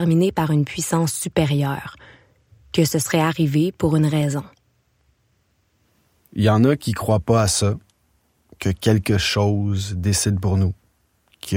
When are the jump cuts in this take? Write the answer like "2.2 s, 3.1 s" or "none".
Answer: none